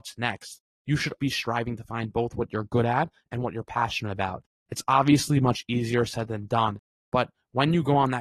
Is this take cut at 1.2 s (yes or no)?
yes